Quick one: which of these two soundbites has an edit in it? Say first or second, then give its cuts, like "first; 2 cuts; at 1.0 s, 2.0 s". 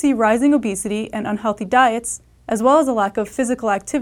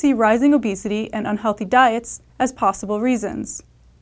second; 1 cut; at 2.3 s